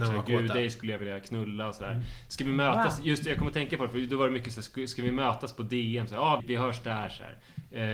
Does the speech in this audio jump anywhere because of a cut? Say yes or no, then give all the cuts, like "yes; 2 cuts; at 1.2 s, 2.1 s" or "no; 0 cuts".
yes; 1 cut; at 6.4 s